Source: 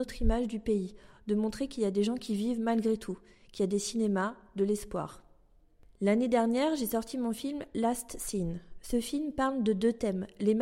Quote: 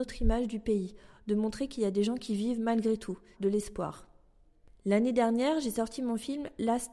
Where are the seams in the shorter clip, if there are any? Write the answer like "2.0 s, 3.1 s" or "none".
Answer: 3.3 s